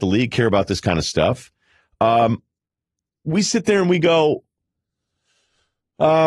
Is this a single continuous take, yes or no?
yes